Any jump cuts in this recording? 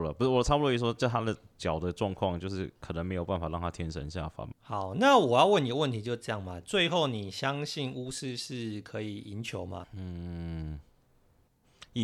yes; 2 cuts; at 4.5 s, 9.8 s

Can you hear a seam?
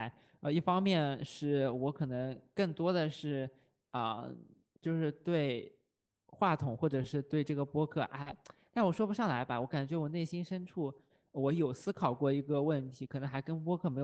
no; 0 cuts

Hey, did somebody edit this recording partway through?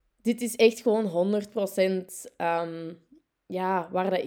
no; 0 cuts

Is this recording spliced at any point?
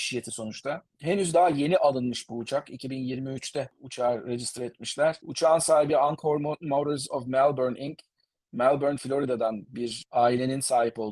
no; 0 cuts

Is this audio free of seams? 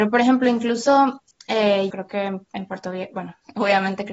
no; 1 cut; at 1.9 s

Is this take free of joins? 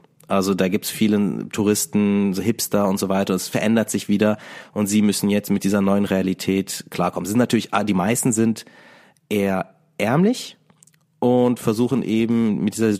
yes; 0 cuts

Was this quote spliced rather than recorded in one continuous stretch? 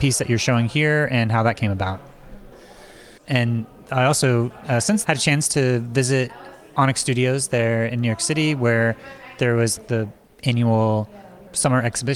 yes; 2 cuts; at 3.2 s, 5.0 s

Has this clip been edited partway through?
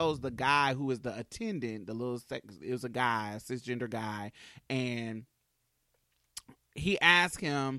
no; 0 cuts

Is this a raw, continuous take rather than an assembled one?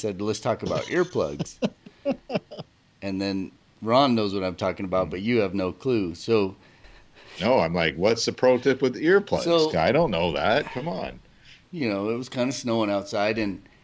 no; 1 cut; at 11.6 s

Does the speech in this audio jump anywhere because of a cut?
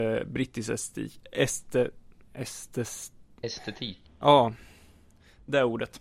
yes; 1 cut; at 4.0 s

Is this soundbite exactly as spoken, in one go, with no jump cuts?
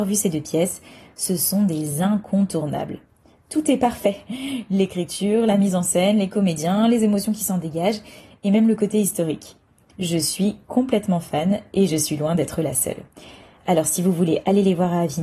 yes; 0 cuts

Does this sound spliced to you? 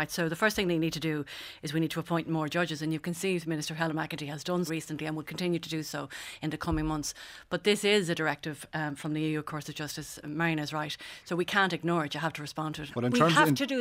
yes; 2 cuts; at 4.7 s, 12.9 s

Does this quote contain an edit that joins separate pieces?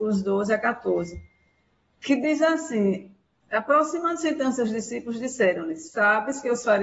no; 0 cuts

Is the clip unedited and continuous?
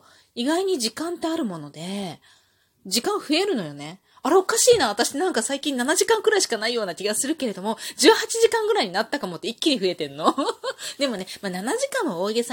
yes; 0 cuts

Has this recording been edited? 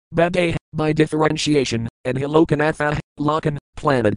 yes; 1 cut; at 3.1 s

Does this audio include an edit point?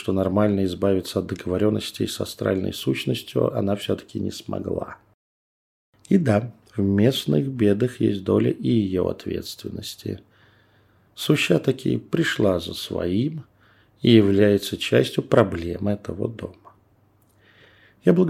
no; 0 cuts

